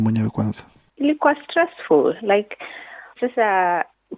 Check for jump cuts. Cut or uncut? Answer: cut